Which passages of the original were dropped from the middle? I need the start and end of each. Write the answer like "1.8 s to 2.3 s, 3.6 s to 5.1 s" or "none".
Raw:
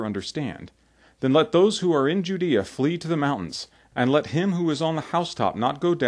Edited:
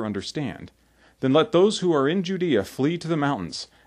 none